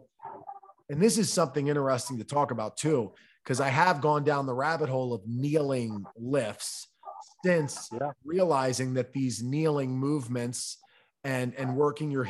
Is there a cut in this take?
no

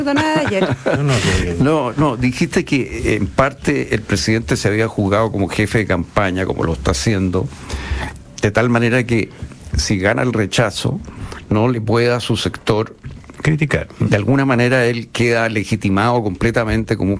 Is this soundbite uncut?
no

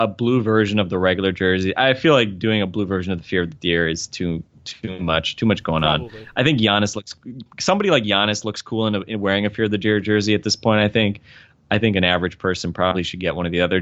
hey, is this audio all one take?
yes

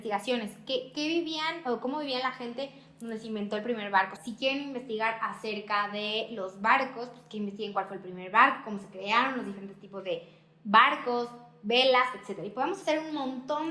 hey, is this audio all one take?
no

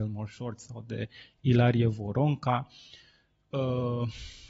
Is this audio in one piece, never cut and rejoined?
yes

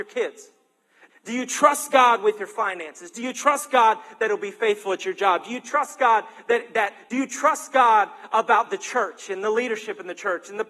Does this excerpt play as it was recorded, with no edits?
no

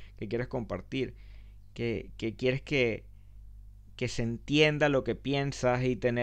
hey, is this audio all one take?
yes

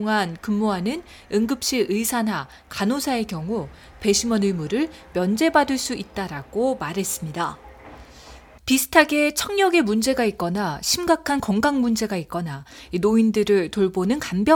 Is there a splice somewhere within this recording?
no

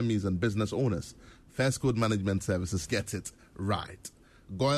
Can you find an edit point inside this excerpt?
yes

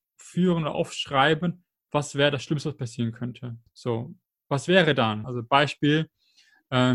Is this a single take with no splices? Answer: no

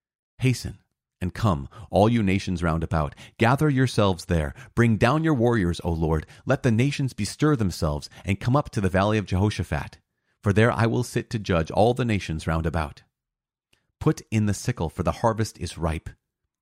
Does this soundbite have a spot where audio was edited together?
no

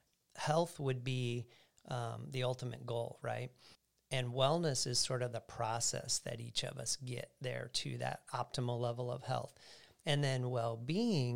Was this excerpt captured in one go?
yes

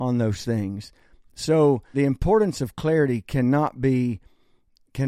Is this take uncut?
no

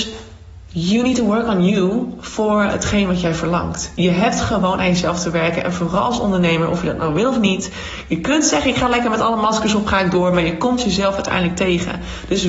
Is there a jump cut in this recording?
no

